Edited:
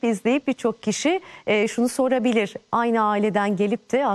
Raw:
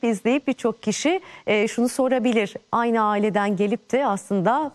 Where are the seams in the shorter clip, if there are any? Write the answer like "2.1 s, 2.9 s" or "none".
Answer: none